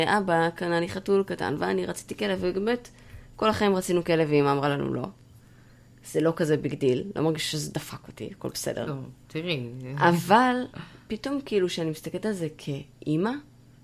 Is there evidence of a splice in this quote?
no; 0 cuts

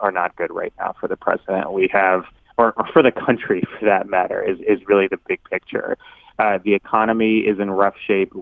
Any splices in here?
no; 0 cuts

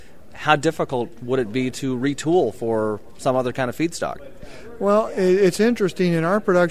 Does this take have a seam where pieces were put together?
no; 0 cuts

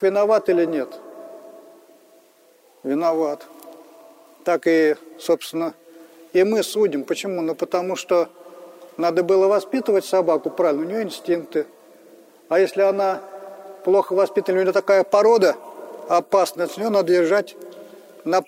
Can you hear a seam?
no; 0 cuts

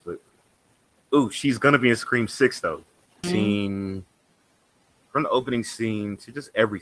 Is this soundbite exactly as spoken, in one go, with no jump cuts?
no; 2 cuts; at 1.0 s, 3.2 s

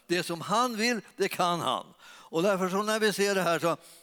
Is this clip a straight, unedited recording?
yes; 0 cuts

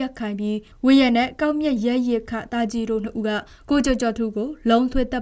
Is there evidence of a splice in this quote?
no; 0 cuts

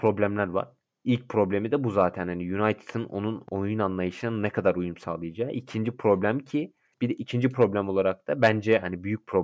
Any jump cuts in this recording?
no; 0 cuts

